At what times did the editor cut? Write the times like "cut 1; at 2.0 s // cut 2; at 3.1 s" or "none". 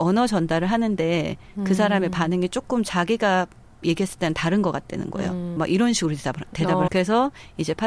cut 1; at 5.6 s // cut 2; at 6.9 s